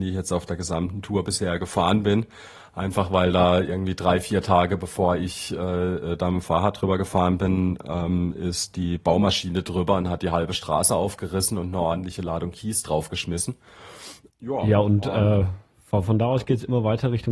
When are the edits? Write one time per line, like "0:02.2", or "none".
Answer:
0:14.3

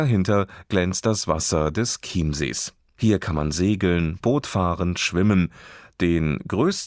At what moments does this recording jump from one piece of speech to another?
none

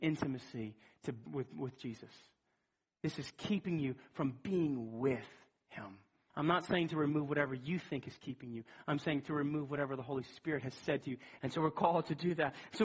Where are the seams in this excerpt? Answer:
0:01.3
0:06.3
0:11.4

